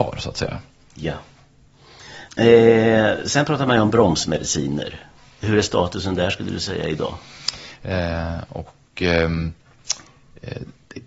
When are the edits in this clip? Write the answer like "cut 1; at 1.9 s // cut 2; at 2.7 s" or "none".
cut 1; at 2.3 s // cut 2; at 7.8 s